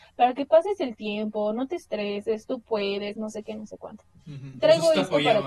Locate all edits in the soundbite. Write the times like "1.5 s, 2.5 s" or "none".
none